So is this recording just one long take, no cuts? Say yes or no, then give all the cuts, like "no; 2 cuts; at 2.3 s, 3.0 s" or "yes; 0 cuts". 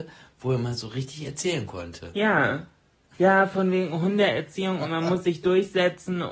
yes; 0 cuts